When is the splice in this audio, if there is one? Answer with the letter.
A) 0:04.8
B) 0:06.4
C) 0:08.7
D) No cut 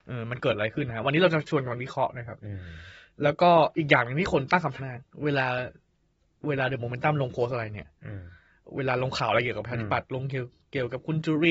A